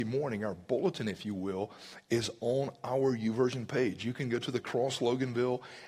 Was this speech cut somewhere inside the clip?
no; 0 cuts

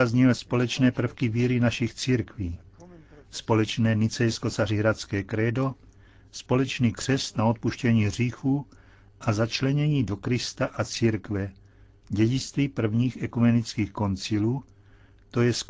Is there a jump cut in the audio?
no; 0 cuts

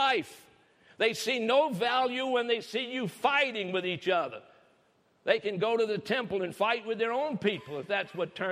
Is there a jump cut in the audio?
no; 0 cuts

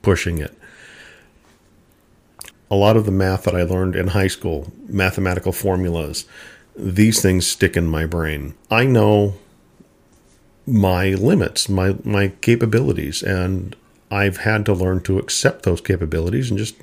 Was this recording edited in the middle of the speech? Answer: yes; 2 cuts; at 2.5 s, 8.6 s

